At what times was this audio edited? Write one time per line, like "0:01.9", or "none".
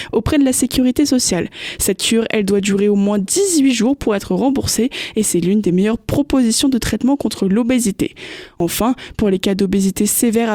none